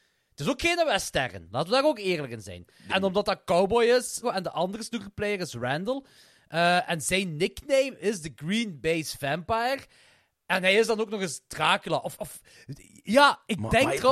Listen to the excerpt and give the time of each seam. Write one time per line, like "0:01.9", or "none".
0:02.9
0:04.2
0:12.2